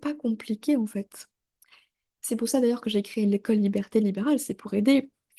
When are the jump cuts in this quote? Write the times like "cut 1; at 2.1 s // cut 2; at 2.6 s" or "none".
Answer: none